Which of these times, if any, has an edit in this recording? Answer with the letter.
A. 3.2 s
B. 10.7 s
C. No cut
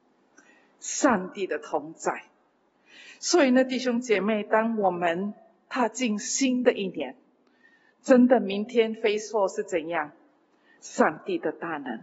B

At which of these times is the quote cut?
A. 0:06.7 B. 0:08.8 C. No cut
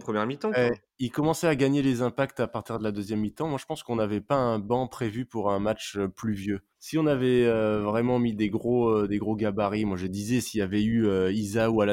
A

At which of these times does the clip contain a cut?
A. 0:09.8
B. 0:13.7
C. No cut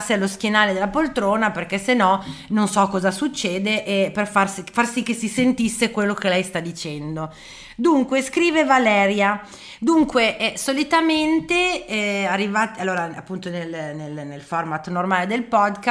A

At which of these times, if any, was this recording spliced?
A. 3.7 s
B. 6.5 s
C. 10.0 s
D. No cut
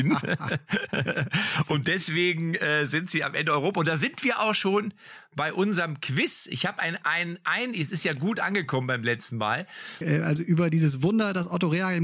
C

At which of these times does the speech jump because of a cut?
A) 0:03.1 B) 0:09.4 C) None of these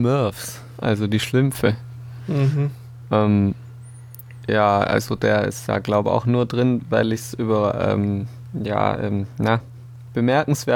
C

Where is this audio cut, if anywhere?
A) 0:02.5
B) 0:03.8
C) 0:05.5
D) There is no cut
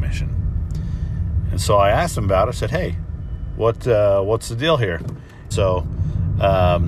C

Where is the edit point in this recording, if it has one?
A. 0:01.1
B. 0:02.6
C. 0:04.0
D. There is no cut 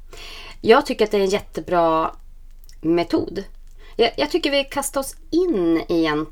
D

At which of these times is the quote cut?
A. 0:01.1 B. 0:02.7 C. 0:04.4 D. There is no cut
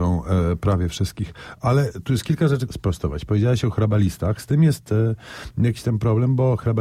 B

